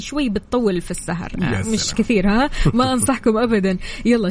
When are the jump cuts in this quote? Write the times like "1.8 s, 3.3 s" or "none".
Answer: none